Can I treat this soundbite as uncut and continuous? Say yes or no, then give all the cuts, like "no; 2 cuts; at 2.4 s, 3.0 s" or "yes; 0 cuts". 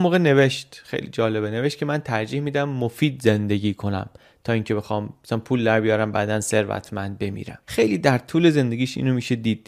no; 1 cut; at 7.6 s